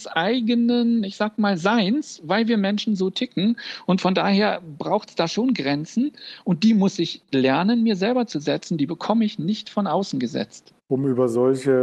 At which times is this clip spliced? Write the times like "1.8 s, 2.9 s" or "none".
10.8 s